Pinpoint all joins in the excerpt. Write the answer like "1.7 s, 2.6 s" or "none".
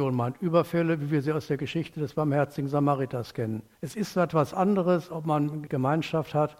3.8 s, 5.7 s